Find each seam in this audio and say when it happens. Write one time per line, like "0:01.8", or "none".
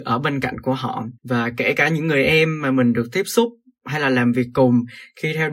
0:01.2